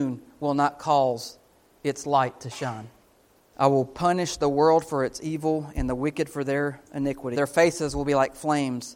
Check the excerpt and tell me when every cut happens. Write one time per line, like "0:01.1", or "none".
0:03.5
0:07.3